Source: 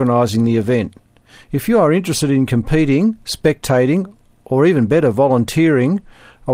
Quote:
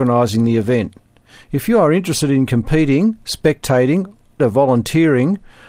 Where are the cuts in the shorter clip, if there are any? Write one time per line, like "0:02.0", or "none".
0:04.4